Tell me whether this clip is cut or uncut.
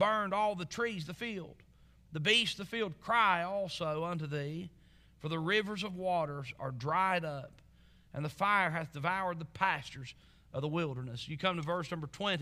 uncut